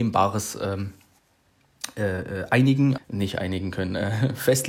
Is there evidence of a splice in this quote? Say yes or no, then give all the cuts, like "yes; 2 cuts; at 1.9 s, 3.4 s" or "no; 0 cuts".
yes; 1 cut; at 3.0 s